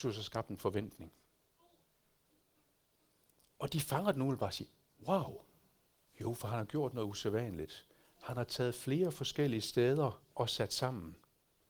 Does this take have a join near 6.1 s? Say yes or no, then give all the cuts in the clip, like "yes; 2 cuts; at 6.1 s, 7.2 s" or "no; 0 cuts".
yes; 2 cuts; at 6.1 s, 10.3 s